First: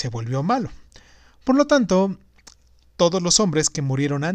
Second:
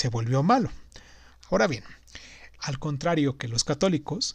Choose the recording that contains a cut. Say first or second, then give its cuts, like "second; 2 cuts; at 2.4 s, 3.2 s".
second; 2 cuts; at 1.3 s, 2.6 s